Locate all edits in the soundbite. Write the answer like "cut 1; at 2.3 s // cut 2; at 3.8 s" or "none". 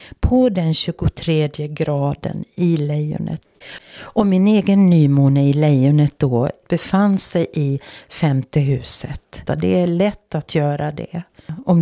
cut 1; at 3.8 s // cut 2; at 9.5 s